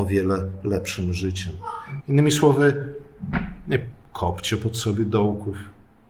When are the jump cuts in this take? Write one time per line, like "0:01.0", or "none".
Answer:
0:02.0